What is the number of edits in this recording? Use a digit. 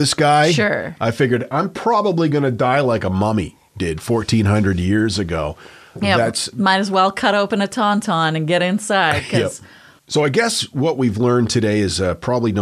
0